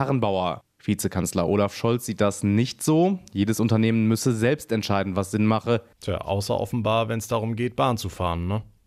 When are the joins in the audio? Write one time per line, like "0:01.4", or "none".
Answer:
0:05.9